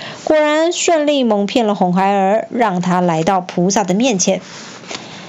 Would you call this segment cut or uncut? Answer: uncut